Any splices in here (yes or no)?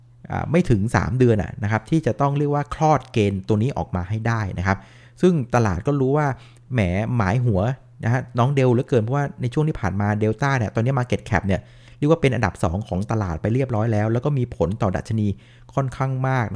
no